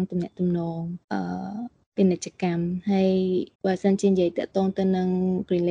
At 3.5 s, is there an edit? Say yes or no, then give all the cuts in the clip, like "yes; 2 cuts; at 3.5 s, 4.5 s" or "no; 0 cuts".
yes; 2 cuts; at 1.0 s, 3.5 s